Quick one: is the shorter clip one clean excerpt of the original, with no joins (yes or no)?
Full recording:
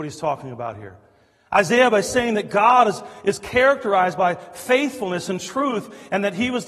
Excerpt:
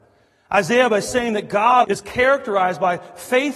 no